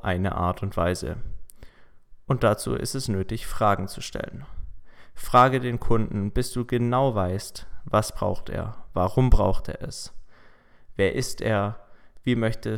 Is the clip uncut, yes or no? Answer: yes